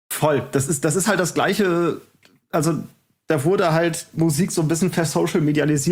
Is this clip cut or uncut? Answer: uncut